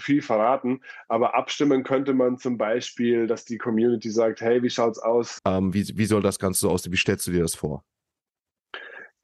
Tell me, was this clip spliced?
yes; 1 cut; at 5.4 s

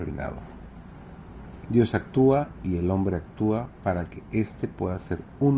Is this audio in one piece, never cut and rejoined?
no; 1 cut; at 1.6 s

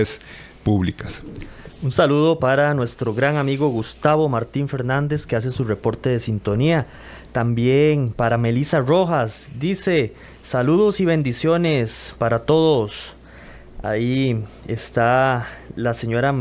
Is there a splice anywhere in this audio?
no; 0 cuts

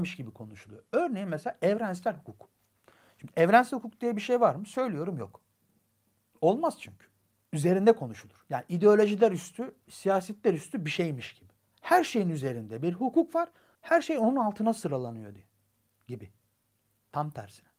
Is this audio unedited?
yes; 0 cuts

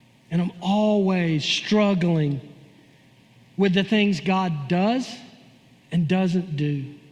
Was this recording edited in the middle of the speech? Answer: no; 0 cuts

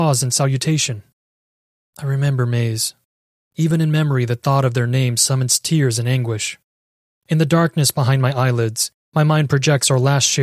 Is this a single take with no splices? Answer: yes; 0 cuts

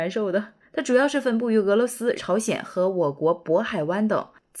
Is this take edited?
yes; 1 cut; at 2.2 s

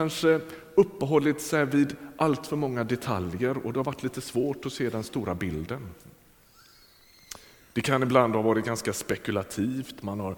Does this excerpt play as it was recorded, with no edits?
yes; 0 cuts

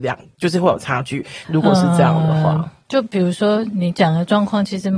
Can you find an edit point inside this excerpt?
yes; 1 cut; at 1.4 s

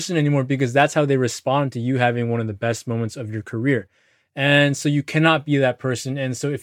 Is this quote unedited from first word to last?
yes; 0 cuts

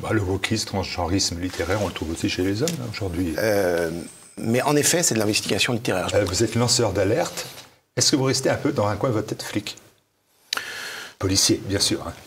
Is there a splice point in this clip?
yes; 2 cuts; at 3.3 s, 6.1 s

